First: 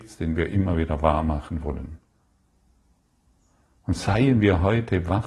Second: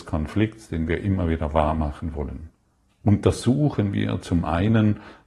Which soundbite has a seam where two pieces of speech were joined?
second; 1 cut; at 2.9 s

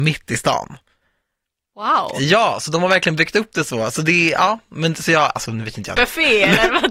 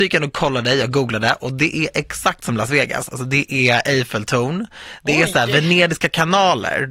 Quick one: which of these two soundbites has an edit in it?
first; 1 cut; at 6.0 s

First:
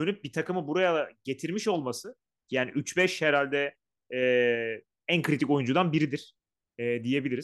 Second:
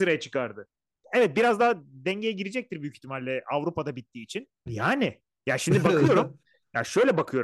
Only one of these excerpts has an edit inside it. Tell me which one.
second; 2 cuts; at 1.0 s, 4.7 s

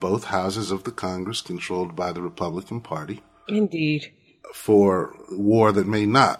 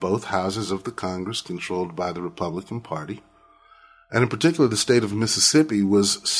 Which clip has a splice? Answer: first; 1 cut; at 3.5 s

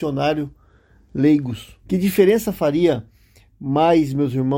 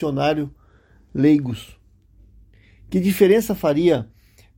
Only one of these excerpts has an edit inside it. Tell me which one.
first; 1 cut; at 1.8 s

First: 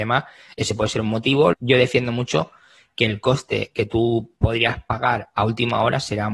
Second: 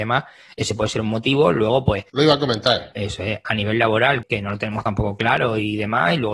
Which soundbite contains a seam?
first; 1 cut; at 1.5 s

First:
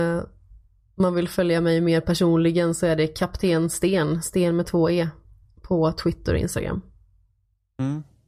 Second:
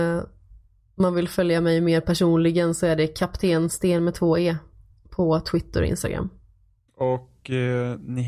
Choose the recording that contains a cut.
second; 2 cuts; at 3.7 s, 6.9 s

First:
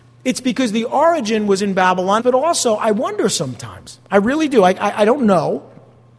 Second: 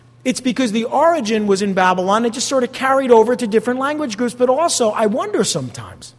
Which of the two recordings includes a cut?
first; 1 cut; at 2.2 s

